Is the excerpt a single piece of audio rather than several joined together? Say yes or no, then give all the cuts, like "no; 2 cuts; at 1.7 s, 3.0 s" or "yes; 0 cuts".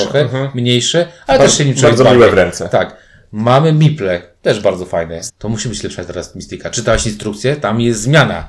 no; 1 cut; at 5.3 s